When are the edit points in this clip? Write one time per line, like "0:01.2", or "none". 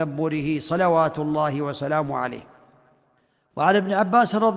none